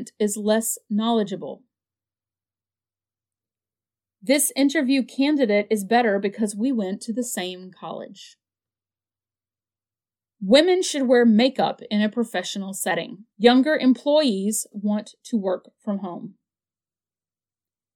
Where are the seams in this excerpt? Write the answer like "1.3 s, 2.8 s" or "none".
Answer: 10.3 s, 13.3 s, 14.7 s